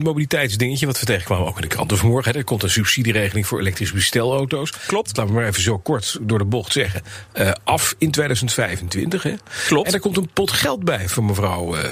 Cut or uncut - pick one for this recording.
cut